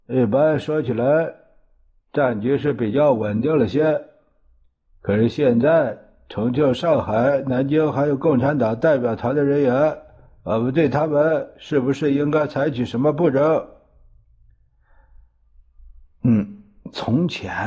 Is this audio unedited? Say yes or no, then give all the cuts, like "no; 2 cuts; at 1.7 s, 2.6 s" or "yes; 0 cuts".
yes; 0 cuts